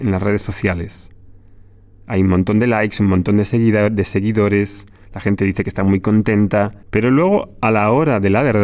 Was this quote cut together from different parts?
yes; 1 cut; at 6.8 s

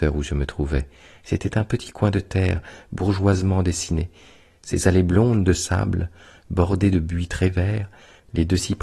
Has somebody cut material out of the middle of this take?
no; 0 cuts

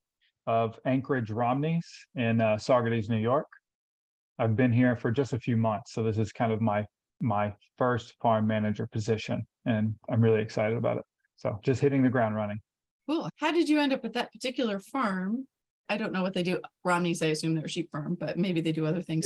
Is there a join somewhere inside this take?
no; 0 cuts

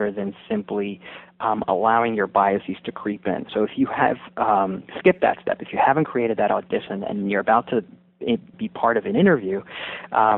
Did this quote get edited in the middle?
yes; 2 cuts; at 3.5 s, 8.5 s

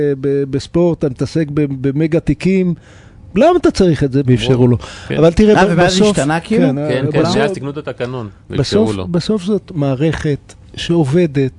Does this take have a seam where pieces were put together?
yes; 1 cut; at 4.2 s

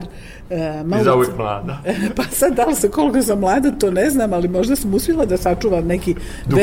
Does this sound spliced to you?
no; 0 cuts

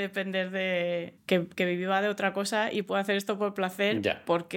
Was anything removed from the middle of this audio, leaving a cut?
yes; 1 cut; at 1.2 s

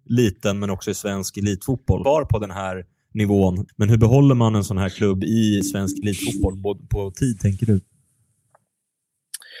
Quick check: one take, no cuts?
no; 2 cuts; at 2.0 s, 3.7 s

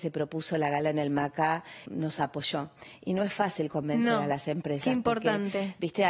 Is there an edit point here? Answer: yes; 1 cut; at 1.9 s

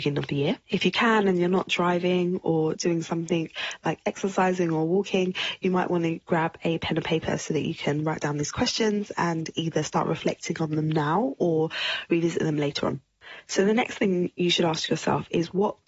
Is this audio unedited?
yes; 0 cuts

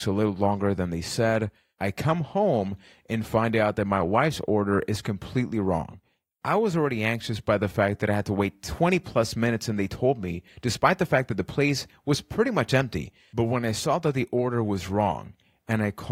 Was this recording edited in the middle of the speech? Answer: no; 0 cuts

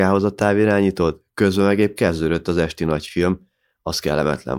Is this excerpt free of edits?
yes; 0 cuts

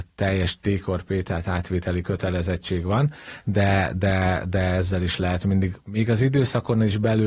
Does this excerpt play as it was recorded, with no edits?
yes; 0 cuts

